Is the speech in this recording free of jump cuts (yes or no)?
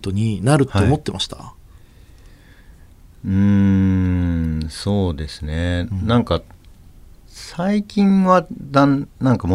yes